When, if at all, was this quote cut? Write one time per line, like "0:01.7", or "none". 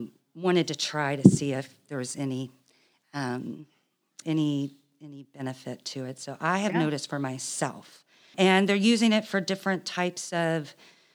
0:04.2
0:08.3